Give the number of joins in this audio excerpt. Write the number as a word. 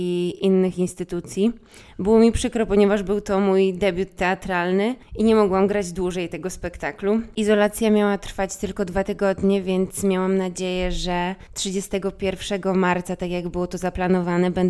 zero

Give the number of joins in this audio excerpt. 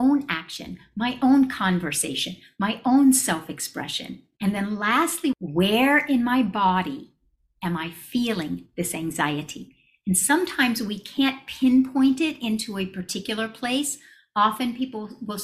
one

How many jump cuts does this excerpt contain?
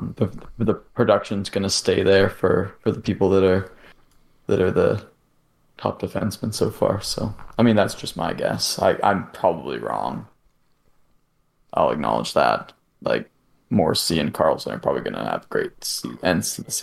zero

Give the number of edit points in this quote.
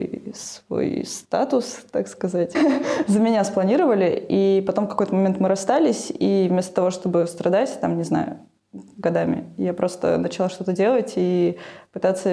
one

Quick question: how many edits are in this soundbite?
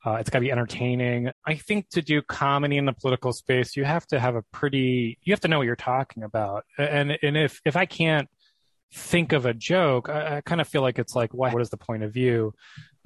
two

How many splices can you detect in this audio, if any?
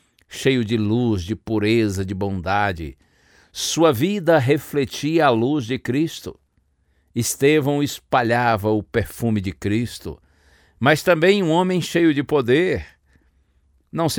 zero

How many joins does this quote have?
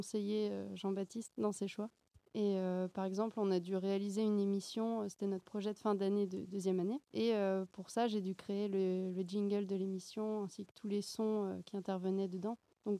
one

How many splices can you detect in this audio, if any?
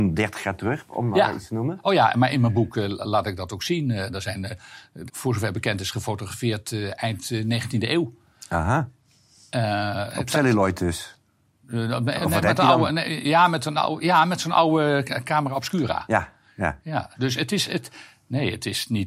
two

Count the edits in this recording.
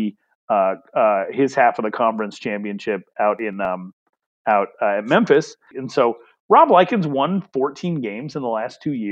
one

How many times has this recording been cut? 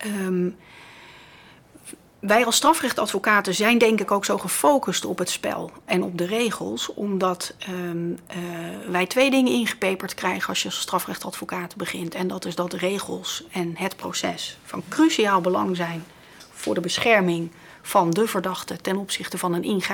zero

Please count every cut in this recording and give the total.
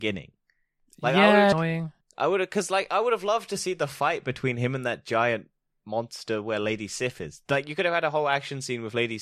one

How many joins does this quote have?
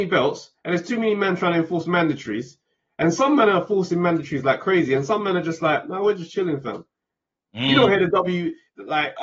zero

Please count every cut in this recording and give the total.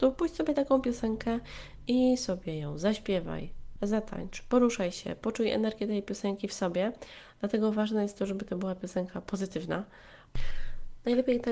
zero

